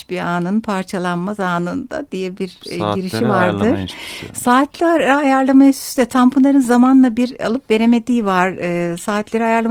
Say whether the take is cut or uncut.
uncut